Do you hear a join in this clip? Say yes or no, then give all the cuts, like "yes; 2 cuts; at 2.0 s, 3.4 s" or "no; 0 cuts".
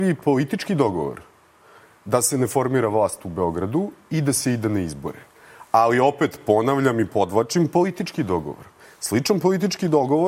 no; 0 cuts